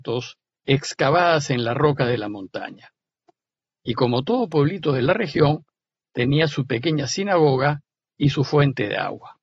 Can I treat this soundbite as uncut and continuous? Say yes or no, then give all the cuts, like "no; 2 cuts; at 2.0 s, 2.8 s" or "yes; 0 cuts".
yes; 0 cuts